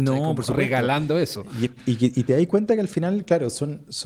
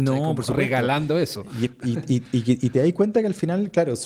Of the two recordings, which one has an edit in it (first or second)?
first